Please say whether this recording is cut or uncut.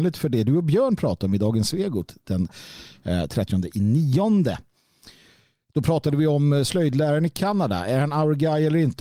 uncut